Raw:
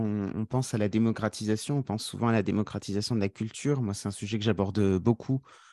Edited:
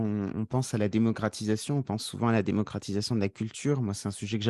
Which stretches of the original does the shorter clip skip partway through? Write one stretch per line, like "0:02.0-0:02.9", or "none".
none